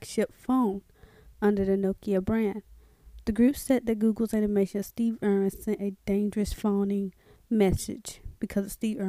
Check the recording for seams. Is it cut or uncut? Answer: cut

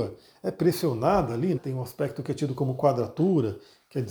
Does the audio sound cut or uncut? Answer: cut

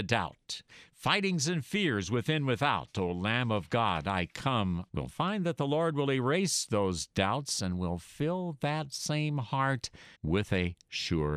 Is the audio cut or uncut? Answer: cut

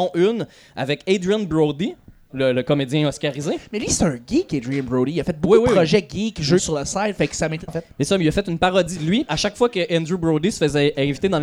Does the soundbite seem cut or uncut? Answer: cut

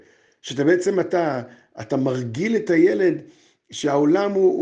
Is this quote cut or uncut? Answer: uncut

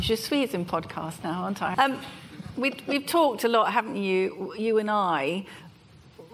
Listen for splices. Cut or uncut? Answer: cut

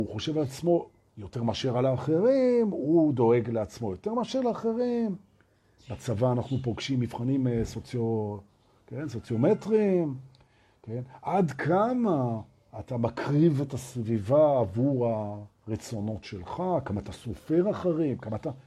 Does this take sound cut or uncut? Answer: uncut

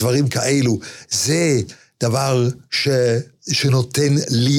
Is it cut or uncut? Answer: uncut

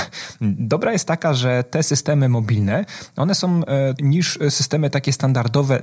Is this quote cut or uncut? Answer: cut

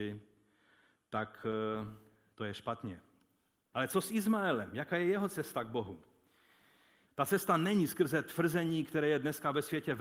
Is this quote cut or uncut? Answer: cut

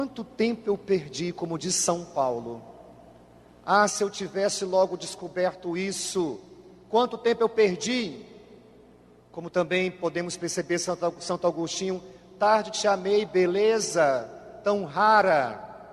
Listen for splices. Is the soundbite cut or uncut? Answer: uncut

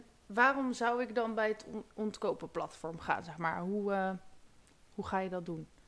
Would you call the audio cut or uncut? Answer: uncut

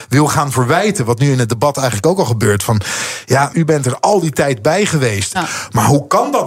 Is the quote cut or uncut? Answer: cut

